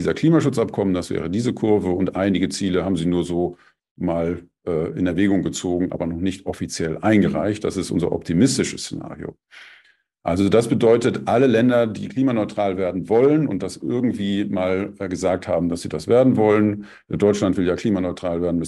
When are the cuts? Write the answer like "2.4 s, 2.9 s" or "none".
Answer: none